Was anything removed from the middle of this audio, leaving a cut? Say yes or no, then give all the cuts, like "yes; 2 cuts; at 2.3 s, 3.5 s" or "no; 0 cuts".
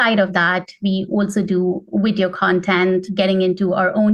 no; 0 cuts